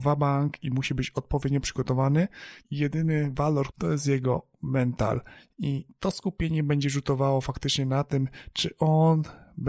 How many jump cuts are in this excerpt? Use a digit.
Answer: 2